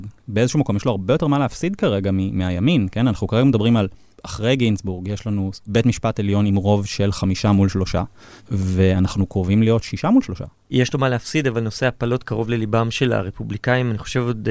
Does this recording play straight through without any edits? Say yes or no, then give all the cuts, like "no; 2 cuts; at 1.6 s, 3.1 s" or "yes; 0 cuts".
yes; 0 cuts